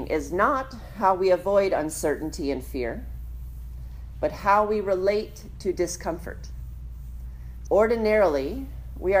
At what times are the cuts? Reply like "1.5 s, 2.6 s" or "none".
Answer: 7.7 s